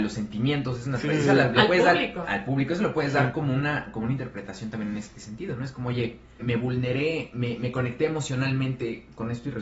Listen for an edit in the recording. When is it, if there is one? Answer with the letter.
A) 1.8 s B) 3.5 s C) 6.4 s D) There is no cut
C